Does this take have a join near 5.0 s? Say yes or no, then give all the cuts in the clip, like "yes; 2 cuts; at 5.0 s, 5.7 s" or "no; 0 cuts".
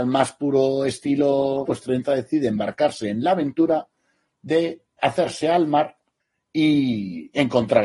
yes; 2 cuts; at 1.6 s, 5.0 s